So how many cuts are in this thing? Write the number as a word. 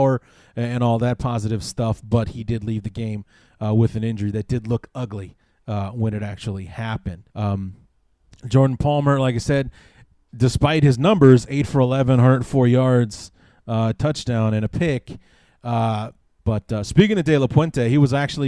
two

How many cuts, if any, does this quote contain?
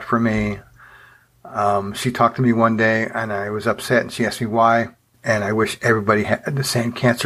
one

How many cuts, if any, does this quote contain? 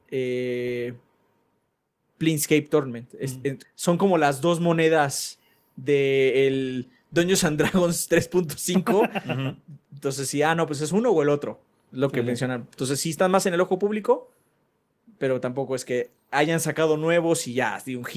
one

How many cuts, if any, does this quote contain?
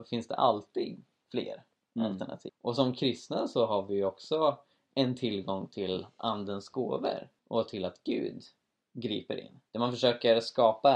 three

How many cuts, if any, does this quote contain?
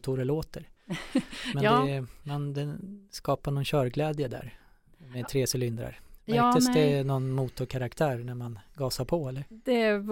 zero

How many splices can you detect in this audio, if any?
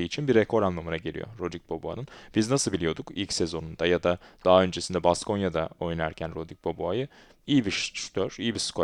zero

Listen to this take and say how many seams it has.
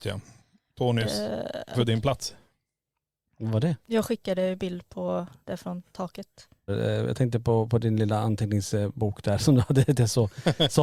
two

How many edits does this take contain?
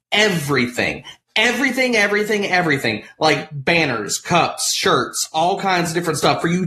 zero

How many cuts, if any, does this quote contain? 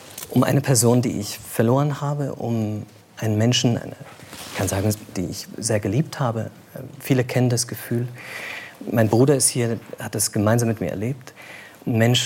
two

